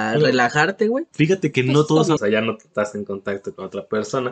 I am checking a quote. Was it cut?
yes; 1 cut; at 2.2 s

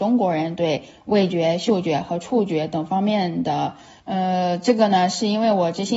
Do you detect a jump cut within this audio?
yes; 1 cut; at 4.0 s

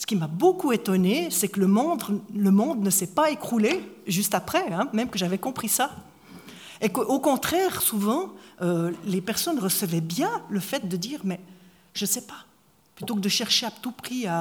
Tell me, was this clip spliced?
no; 0 cuts

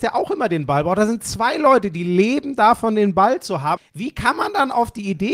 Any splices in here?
yes; 1 cut; at 3.8 s

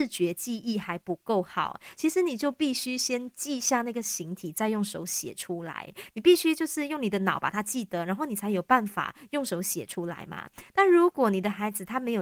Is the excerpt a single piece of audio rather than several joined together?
no; 1 cut; at 1.9 s

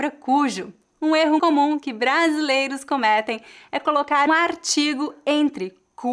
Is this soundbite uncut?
no; 2 cuts; at 1.4 s, 4.3 s

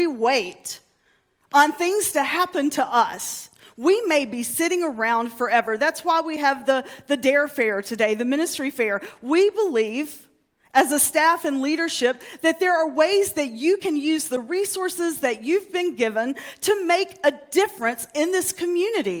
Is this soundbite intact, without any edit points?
yes; 0 cuts

